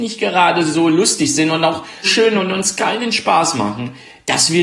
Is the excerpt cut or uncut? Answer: cut